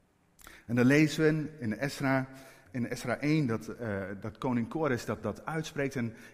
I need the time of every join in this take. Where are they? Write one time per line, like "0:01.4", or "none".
0:02.7